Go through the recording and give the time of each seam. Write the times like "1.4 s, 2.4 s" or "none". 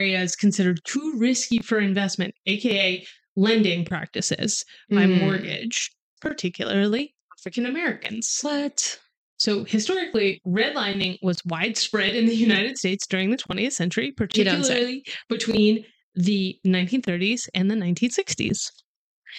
6.2 s